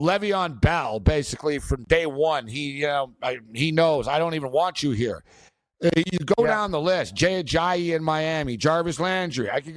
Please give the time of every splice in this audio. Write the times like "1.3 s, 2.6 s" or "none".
none

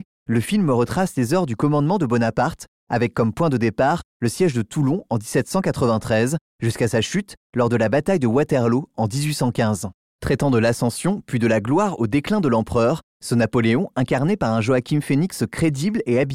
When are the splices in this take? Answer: none

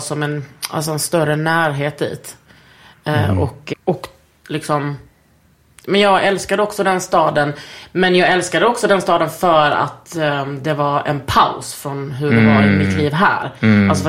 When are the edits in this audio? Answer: 3.7 s

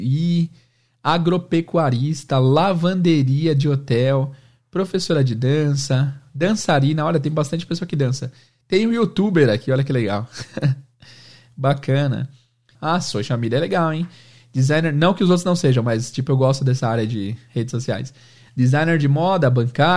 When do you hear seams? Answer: 12.8 s

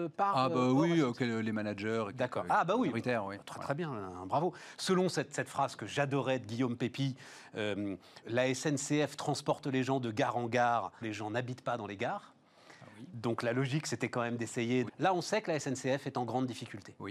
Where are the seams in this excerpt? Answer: 8.2 s, 11.0 s, 14.9 s

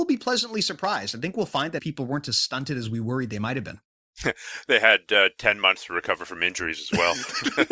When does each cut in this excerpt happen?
1.8 s

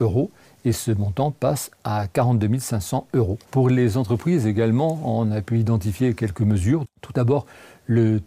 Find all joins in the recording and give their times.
3.5 s, 6.8 s

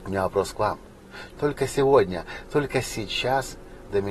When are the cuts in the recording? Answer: 1.3 s

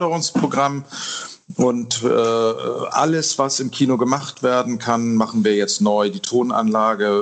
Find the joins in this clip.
none

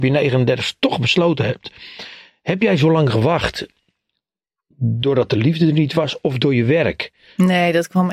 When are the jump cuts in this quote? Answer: none

